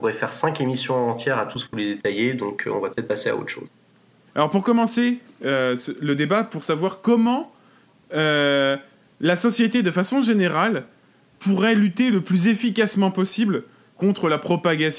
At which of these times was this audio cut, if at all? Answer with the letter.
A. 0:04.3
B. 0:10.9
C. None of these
A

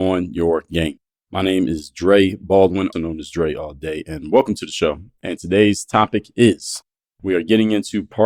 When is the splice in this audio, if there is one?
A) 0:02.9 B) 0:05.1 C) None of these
A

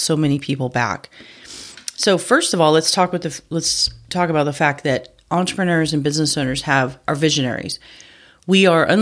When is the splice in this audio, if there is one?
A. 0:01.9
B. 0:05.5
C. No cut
C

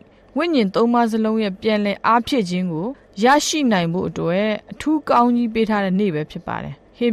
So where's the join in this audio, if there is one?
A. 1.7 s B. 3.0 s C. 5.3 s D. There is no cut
D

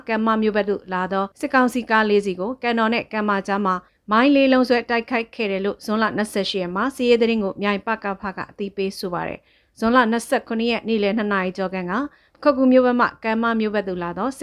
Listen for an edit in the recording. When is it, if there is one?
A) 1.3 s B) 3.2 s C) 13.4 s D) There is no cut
A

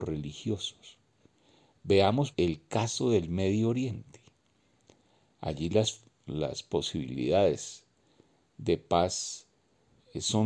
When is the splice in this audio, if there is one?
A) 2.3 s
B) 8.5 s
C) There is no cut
A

